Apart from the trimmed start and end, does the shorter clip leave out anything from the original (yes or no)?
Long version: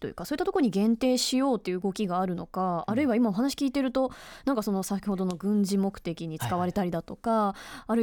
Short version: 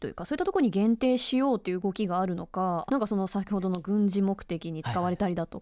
yes